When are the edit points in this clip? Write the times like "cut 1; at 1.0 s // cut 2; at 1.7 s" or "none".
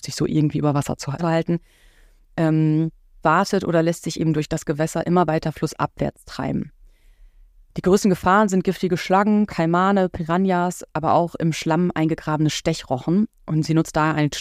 cut 1; at 1.2 s // cut 2; at 3.2 s